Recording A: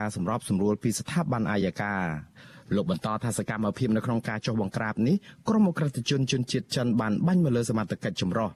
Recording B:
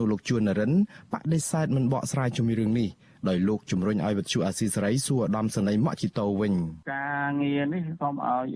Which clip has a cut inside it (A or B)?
B